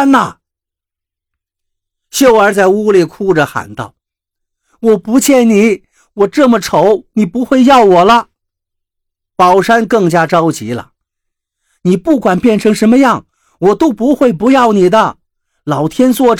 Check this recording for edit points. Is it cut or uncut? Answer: uncut